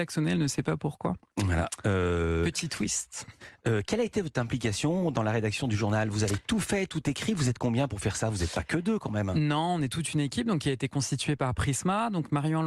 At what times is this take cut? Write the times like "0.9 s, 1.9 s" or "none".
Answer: none